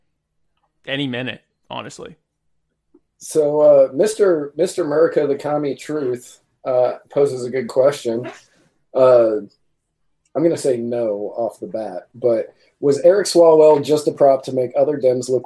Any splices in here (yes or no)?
no